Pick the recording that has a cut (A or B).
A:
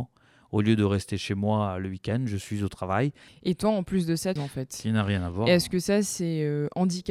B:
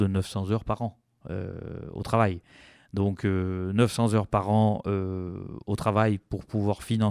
A